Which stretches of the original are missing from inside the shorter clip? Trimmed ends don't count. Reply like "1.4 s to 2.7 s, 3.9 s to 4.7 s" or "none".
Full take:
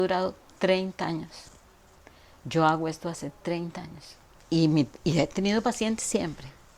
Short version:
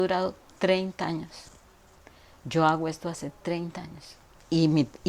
none